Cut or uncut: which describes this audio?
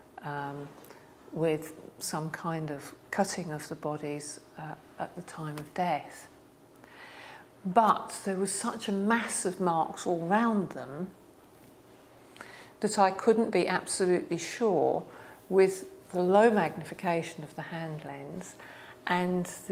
uncut